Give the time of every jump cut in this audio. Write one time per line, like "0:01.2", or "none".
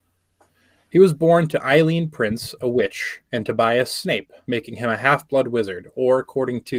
0:04.4